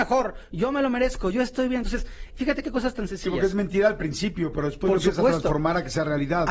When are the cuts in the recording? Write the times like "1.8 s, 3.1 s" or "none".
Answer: none